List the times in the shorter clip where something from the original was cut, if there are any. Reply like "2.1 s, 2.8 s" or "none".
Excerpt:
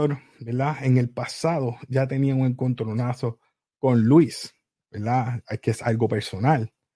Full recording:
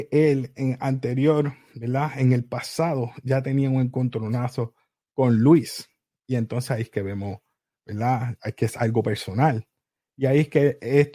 4.8 s